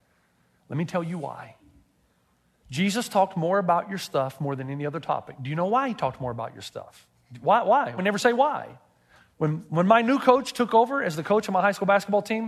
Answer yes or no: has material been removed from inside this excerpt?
yes